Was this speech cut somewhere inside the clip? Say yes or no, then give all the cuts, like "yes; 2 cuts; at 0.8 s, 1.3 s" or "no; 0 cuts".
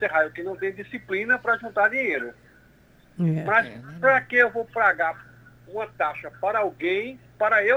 no; 0 cuts